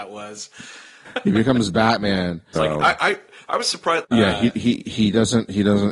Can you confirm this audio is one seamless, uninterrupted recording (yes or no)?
no